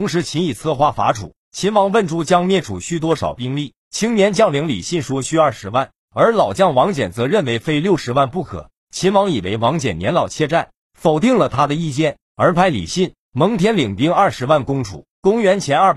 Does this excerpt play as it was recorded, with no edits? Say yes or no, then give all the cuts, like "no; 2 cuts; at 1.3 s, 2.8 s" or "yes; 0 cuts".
yes; 0 cuts